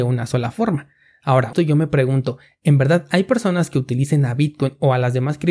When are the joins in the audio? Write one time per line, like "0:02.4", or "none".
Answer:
0:01.5